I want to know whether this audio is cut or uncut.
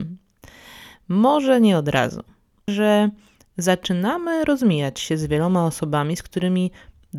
cut